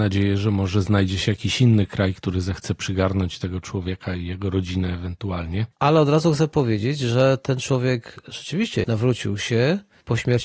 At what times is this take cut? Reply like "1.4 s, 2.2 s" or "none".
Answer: 5.7 s, 8.8 s

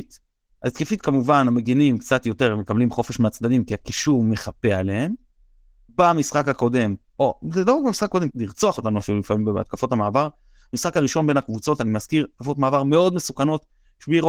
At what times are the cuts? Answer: 5.9 s, 8.3 s

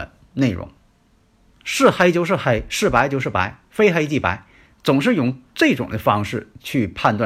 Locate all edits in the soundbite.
1.5 s

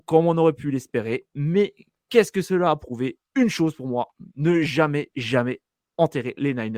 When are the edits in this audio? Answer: 5.1 s

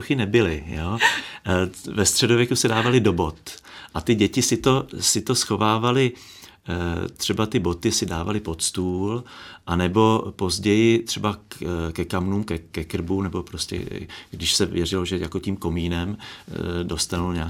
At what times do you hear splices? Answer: none

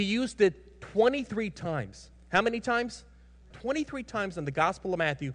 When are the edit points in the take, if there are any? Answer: 3.5 s

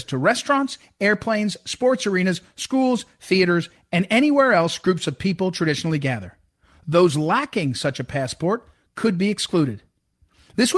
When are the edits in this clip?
none

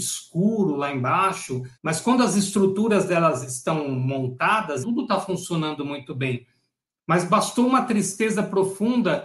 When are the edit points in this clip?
1.8 s, 4.8 s

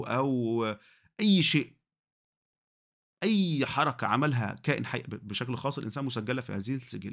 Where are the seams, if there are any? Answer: none

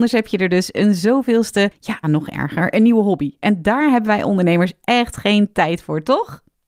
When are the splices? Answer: 2.0 s

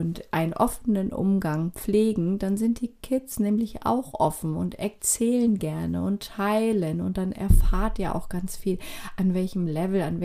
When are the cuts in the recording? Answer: none

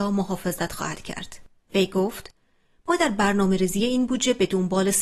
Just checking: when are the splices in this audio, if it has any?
1.6 s

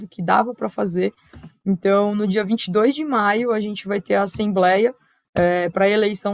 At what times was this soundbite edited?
none

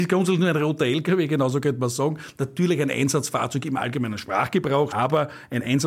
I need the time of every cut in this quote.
4.9 s

